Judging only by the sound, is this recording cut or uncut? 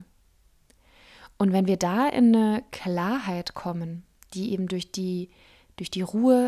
uncut